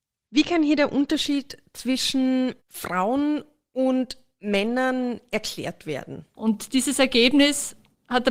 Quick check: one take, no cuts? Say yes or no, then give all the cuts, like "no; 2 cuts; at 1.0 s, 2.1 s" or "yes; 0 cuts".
no; 2 cuts; at 2.6 s, 6.3 s